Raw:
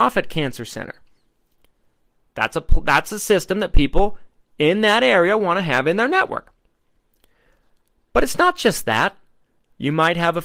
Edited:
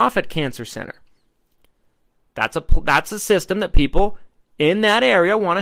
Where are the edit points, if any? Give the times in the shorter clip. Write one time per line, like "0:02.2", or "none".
none

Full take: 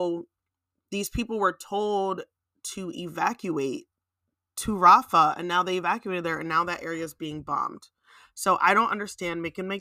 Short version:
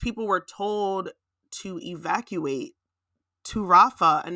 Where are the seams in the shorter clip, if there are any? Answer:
none

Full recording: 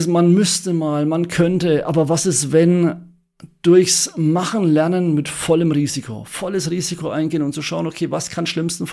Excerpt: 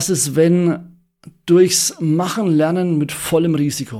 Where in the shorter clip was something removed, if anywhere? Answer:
none

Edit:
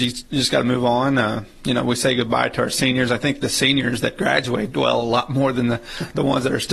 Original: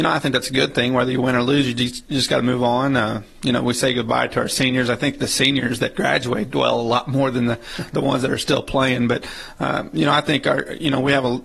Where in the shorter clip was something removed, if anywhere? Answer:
none

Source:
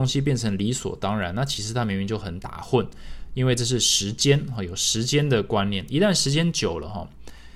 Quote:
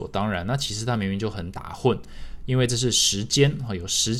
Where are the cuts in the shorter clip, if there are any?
none

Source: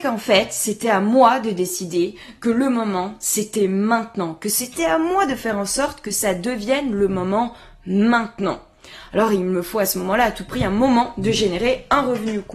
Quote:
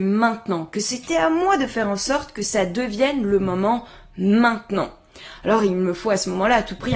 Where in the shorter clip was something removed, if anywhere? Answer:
none

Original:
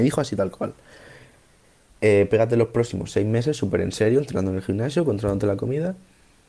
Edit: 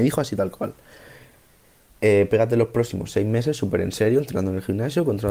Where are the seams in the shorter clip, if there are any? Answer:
none

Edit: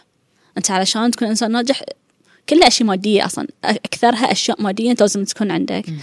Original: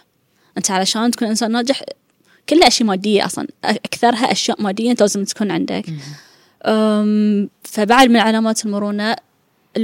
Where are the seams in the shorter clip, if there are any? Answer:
none

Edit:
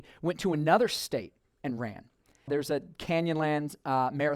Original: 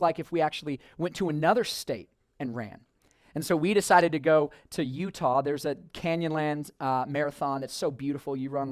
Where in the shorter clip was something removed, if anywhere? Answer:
0:02.5

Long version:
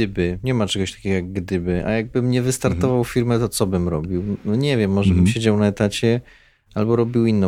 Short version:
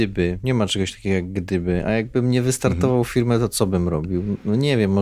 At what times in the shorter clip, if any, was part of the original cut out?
none

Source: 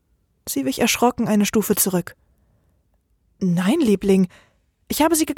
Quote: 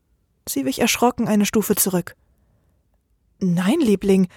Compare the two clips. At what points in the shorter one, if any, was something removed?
none

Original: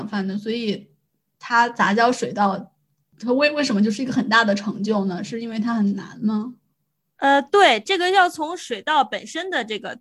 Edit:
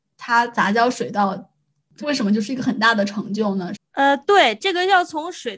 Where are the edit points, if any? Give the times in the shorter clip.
0:02.0
0:03.8

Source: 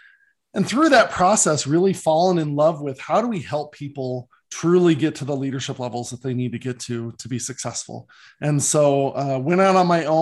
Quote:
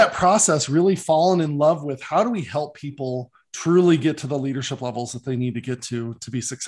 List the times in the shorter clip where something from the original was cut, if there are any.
none

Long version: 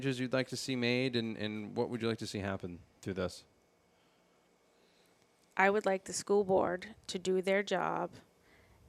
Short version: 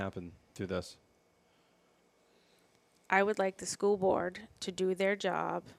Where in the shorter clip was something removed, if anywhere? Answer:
none

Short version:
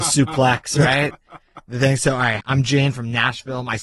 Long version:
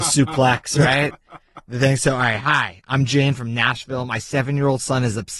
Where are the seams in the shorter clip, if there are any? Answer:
0:02.4

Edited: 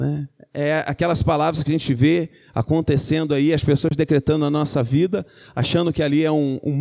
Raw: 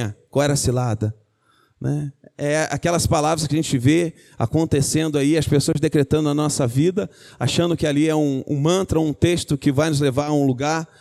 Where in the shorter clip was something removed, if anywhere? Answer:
none

